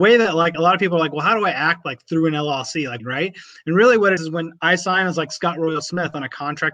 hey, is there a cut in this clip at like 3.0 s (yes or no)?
yes